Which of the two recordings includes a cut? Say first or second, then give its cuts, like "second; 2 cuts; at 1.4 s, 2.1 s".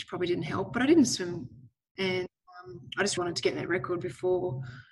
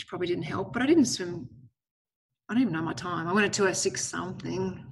first; 2 cuts; at 2.0 s, 3.2 s